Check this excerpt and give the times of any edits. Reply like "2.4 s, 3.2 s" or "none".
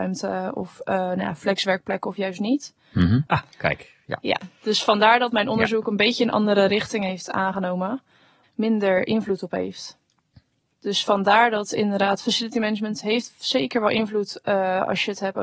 3.3 s, 8.4 s